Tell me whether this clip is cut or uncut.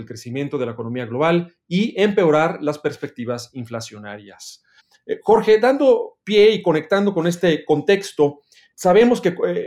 cut